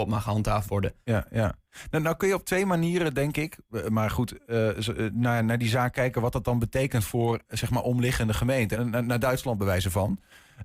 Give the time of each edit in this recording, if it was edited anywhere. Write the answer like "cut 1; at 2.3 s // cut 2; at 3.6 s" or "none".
cut 1; at 8.7 s